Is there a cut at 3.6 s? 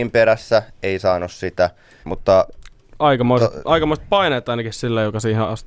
no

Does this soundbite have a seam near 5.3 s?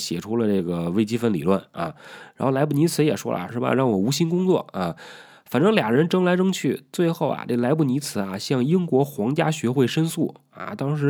no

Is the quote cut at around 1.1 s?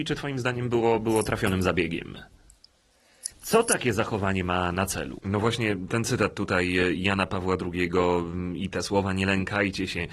no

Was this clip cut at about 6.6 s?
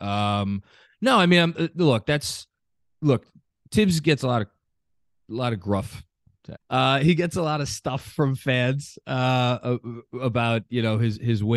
yes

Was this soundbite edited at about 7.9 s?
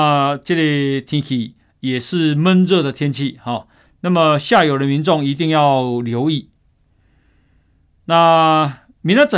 no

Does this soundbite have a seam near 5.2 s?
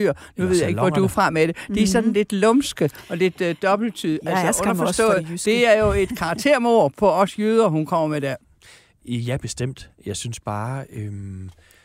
no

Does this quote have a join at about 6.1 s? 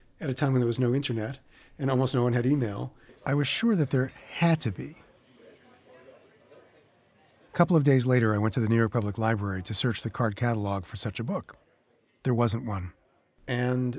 no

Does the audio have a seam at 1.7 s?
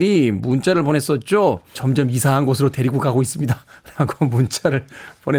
yes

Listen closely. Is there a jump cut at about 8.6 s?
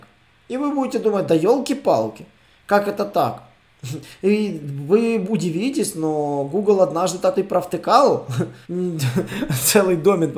yes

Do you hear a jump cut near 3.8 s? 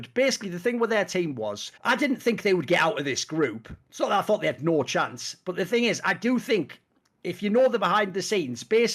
no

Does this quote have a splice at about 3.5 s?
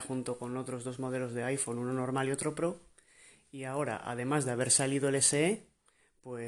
no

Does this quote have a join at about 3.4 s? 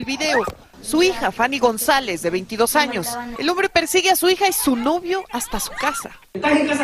yes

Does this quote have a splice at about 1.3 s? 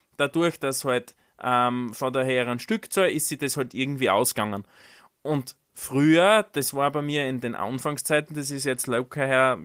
no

